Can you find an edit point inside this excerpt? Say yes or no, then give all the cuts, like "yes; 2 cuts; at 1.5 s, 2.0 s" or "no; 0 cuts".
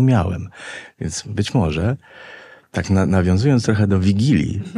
no; 0 cuts